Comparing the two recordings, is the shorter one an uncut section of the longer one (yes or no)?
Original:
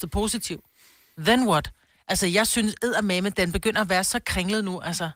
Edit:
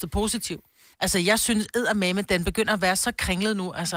no